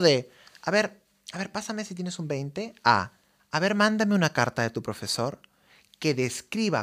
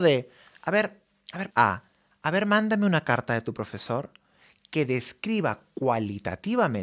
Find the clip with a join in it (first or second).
second